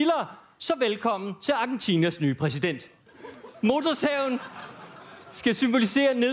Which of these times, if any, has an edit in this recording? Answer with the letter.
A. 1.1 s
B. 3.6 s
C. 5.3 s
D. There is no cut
D